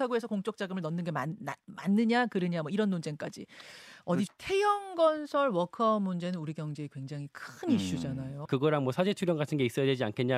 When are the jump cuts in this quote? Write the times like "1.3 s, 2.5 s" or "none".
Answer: 4.3 s, 8.5 s